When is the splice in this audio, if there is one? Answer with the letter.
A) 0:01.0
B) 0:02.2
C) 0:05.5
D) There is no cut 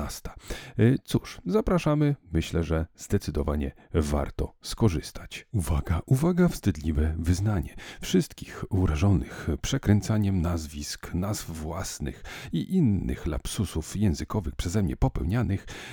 C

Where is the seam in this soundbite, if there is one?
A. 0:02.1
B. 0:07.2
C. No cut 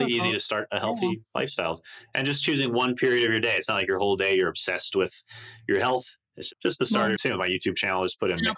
B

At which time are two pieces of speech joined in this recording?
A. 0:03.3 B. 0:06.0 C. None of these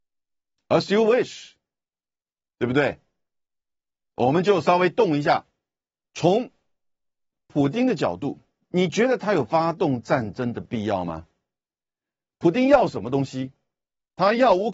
B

